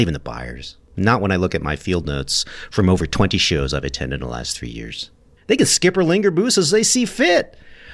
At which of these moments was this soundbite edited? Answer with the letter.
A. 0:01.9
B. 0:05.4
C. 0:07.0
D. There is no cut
B